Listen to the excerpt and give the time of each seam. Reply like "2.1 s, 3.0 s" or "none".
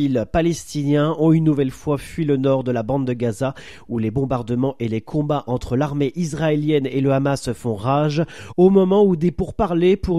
none